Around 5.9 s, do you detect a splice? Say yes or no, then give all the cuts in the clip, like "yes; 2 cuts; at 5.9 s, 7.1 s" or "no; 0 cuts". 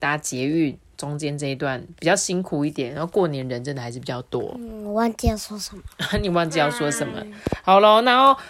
no; 0 cuts